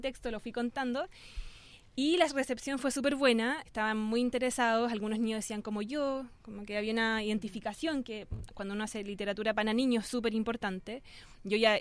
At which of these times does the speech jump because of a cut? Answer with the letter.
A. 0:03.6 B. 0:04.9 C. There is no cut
A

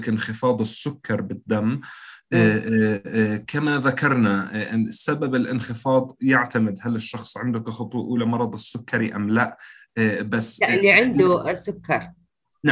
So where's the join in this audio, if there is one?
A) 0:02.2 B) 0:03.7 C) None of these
C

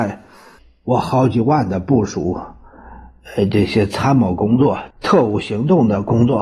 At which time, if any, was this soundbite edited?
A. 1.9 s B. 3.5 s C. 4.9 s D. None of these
C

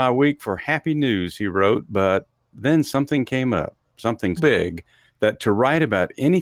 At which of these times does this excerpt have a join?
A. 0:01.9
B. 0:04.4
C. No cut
B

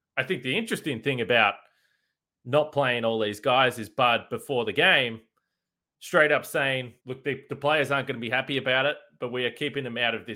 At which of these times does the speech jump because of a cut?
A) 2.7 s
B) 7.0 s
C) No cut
B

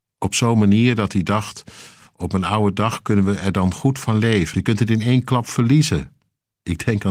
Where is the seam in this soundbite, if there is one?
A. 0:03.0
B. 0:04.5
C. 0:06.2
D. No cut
B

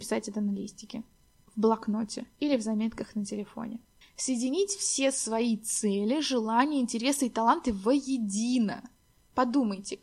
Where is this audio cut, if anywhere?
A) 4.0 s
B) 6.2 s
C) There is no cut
A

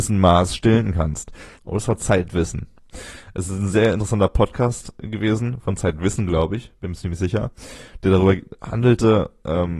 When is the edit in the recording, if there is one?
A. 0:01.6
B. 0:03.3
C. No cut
A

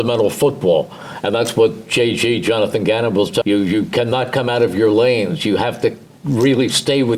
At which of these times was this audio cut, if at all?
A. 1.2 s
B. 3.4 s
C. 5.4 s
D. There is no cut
B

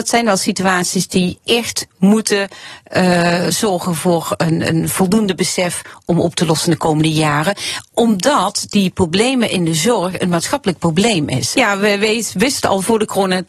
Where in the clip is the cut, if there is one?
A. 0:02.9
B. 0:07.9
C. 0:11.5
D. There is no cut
C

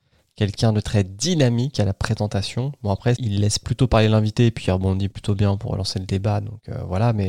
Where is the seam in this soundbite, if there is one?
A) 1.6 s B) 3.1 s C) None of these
B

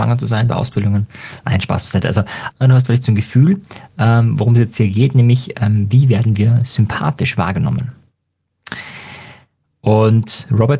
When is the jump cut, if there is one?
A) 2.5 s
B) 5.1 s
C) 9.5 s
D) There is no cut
A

